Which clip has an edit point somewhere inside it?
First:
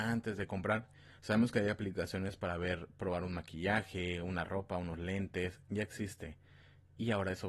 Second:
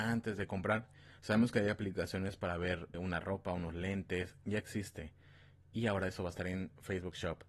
second; 1 cut; at 2.9 s

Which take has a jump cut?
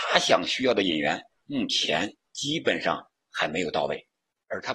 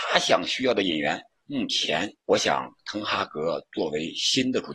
second; 1 cut; at 2.2 s

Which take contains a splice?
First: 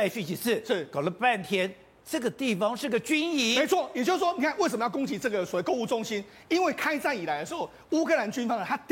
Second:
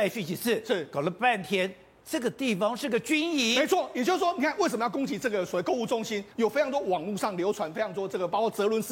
second; 1 cut; at 6.3 s

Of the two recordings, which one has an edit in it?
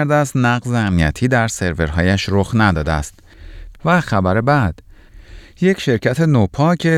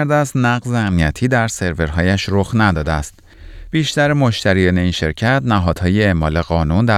first; 1 cut; at 3.7 s

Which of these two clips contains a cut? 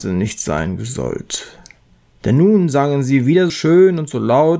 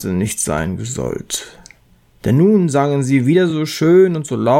first; 1 cut; at 3.5 s

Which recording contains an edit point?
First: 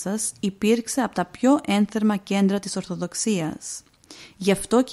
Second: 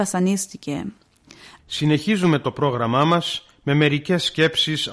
second; 1 cut; at 1.6 s

